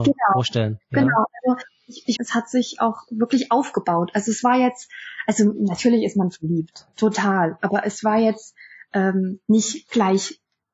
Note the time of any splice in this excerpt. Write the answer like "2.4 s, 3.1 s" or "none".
2.2 s